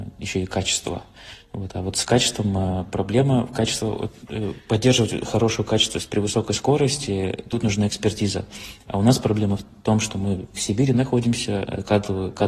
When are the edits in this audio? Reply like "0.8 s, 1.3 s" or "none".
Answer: none